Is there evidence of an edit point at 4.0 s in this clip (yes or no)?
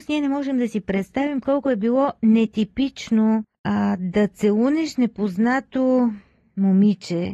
no